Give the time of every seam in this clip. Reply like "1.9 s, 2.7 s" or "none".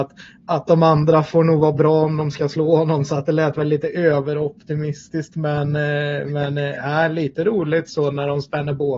none